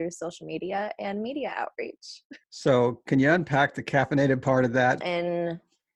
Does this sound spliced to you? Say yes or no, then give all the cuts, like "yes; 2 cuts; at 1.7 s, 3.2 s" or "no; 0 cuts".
yes; 2 cuts; at 2.4 s, 5.0 s